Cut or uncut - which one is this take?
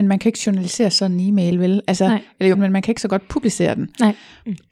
cut